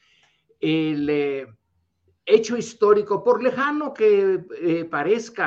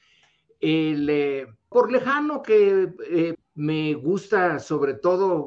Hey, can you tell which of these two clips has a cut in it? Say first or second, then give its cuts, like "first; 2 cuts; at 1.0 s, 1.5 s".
second; 2 cuts; at 1.7 s, 3.3 s